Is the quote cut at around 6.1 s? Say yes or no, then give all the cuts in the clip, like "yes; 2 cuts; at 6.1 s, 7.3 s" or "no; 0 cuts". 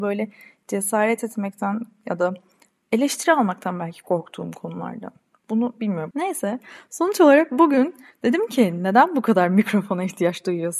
yes; 1 cut; at 6.1 s